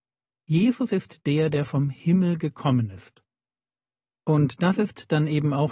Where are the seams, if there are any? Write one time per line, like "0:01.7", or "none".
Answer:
none

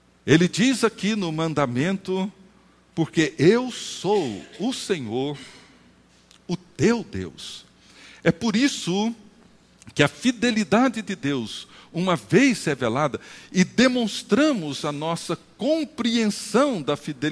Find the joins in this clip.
none

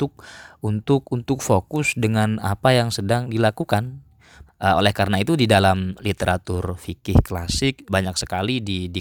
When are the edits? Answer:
0:04.5
0:07.9

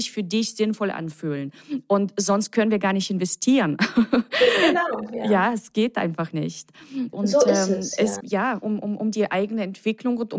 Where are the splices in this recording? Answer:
0:07.1
0:08.2

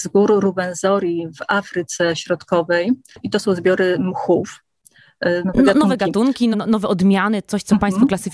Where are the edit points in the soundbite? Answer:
0:05.4
0:06.5

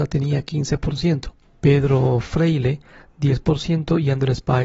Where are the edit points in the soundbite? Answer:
0:01.5

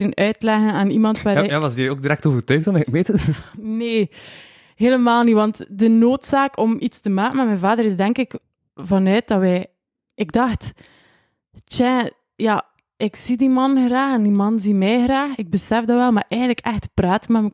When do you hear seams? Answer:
none

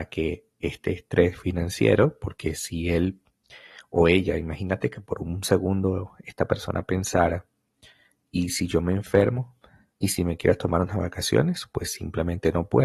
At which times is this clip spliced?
0:09.9

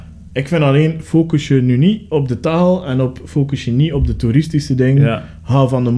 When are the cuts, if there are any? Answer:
none

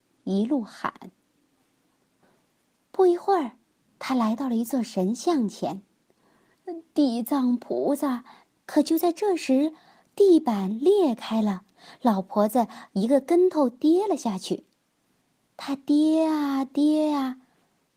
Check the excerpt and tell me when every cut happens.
0:08.6

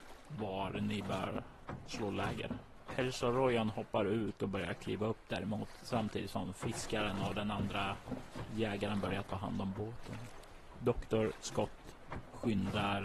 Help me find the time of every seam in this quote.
none

